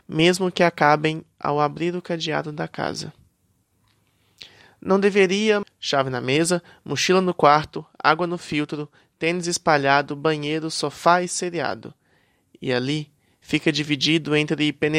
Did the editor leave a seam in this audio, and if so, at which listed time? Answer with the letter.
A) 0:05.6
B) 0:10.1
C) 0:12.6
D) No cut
A